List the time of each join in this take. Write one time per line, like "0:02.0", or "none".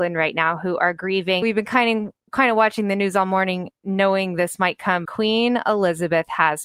0:01.4
0:05.1